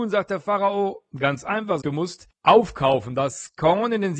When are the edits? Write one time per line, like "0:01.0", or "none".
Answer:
0:01.8